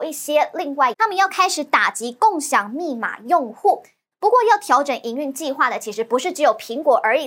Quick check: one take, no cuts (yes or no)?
no